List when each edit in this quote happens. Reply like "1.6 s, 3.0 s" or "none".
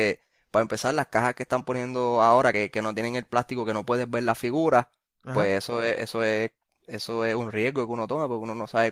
none